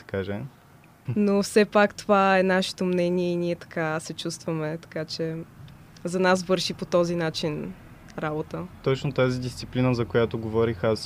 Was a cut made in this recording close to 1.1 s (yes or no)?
yes